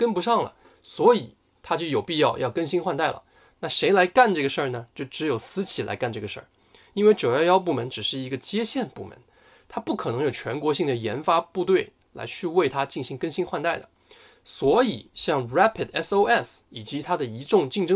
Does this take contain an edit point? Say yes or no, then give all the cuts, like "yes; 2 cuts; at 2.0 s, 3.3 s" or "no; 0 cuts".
no; 0 cuts